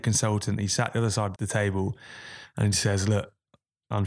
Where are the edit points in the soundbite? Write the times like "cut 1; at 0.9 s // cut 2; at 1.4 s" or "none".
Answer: cut 1; at 1.4 s